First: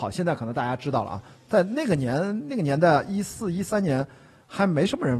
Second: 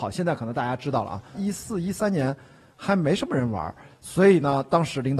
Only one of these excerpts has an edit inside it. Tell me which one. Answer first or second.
second